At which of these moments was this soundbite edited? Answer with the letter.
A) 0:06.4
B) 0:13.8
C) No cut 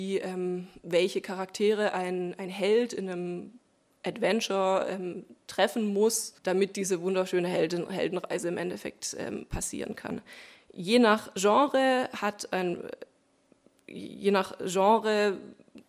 A